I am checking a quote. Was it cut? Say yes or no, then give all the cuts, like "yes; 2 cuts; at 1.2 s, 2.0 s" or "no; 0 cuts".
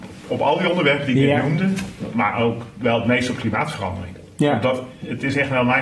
no; 0 cuts